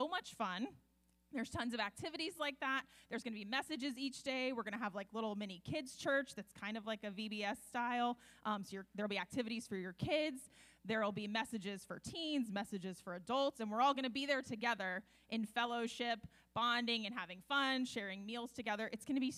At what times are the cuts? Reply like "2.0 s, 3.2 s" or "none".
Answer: none